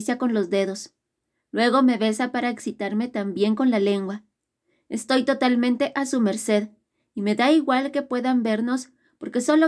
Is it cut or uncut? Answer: uncut